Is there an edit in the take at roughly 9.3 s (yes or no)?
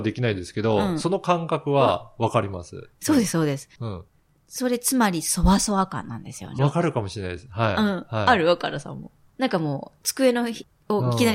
no